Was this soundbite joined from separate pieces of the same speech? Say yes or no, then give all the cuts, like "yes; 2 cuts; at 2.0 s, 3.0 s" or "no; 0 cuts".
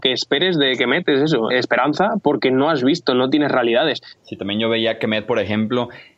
yes; 2 cuts; at 1.5 s, 4.2 s